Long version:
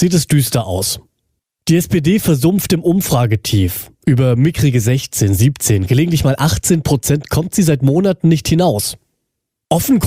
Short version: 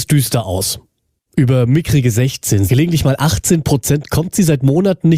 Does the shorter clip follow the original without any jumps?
no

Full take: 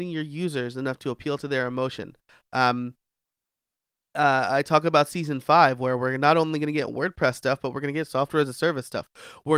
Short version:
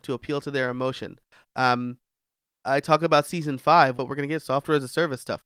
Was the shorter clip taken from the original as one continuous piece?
no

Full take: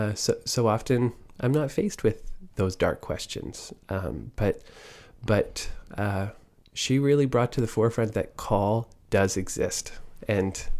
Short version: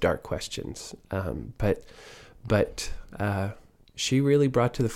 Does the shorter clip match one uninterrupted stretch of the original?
yes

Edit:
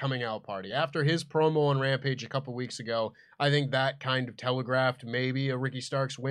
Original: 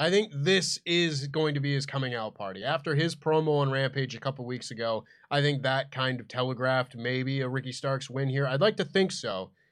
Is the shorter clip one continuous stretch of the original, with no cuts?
yes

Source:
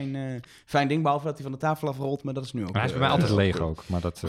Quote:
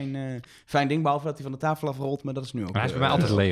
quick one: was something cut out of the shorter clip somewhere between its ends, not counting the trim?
no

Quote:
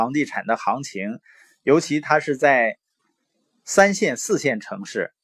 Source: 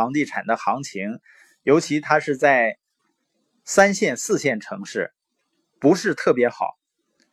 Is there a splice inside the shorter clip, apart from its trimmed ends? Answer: no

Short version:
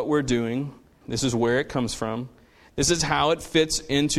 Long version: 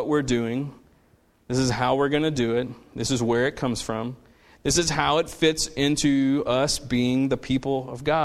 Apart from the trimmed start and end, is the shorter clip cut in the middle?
yes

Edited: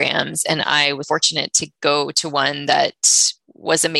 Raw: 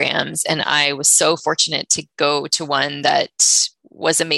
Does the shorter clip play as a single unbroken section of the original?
no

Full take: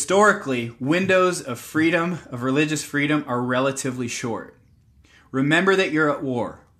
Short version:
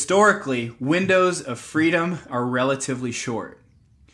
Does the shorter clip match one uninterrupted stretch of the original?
no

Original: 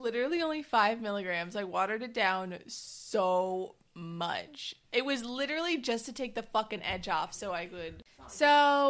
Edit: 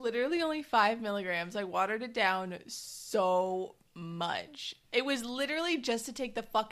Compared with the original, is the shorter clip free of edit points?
yes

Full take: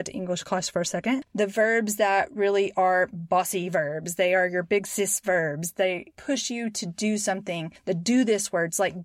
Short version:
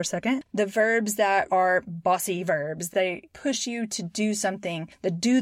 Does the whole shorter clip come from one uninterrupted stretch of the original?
no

